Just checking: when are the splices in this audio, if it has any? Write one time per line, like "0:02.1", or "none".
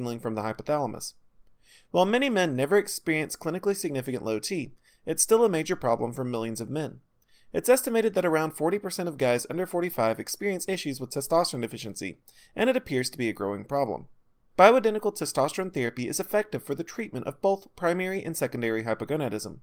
0:14.5